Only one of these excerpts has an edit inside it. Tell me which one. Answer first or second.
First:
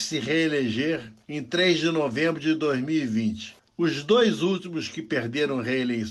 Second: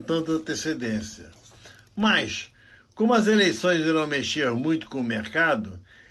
first